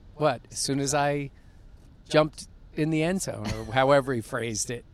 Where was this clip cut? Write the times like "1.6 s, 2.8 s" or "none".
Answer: none